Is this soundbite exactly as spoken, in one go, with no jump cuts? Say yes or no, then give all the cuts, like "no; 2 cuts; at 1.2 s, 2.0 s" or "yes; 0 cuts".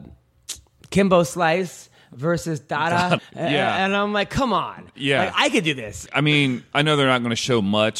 no; 2 cuts; at 3.2 s, 6.1 s